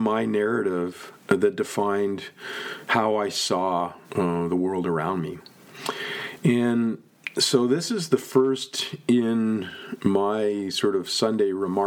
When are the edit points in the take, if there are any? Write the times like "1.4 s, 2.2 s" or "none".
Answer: 4.0 s